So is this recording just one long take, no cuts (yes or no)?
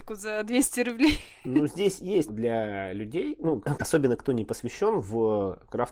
no